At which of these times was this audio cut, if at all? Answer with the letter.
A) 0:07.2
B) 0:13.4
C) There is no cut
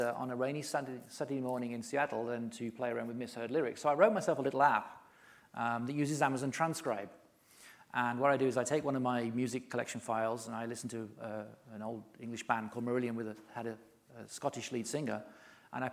C